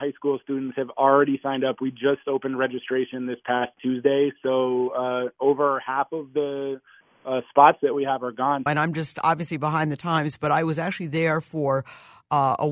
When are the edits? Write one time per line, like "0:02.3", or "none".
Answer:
0:08.7